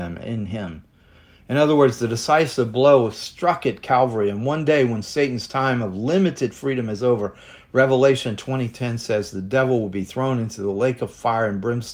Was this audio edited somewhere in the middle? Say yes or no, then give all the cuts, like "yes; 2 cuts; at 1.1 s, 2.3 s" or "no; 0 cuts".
no; 0 cuts